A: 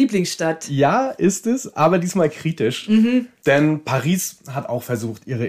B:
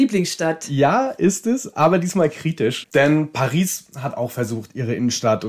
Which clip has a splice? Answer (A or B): B